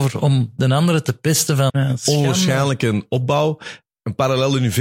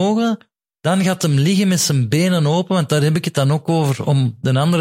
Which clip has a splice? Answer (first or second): first